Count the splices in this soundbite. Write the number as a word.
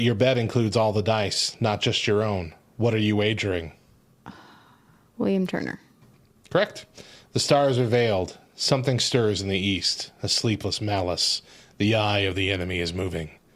zero